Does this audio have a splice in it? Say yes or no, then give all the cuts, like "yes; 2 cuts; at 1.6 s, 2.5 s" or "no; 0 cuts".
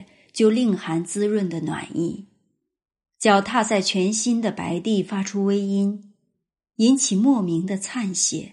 no; 0 cuts